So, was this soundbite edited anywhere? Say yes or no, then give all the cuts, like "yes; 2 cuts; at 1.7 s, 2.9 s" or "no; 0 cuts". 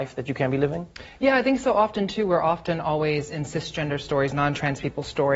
no; 0 cuts